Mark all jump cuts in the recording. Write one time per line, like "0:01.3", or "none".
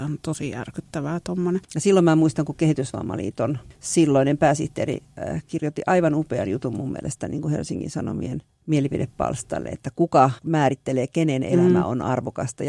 0:01.6